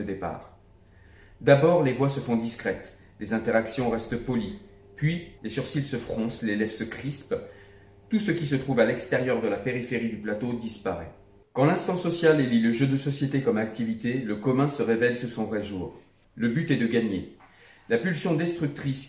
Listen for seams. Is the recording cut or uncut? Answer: cut